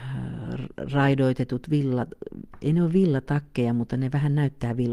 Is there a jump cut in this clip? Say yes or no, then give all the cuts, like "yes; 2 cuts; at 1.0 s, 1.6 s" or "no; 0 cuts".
no; 0 cuts